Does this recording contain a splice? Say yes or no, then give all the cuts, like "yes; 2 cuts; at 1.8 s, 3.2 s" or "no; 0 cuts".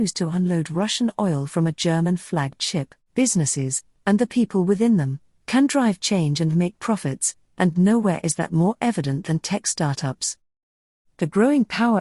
yes; 1 cut; at 3.0 s